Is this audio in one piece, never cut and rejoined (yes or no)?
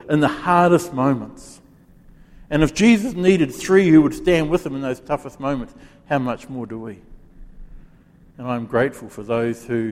yes